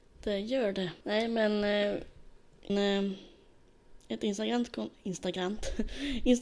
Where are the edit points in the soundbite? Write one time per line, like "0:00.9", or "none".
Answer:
0:01.0
0:02.7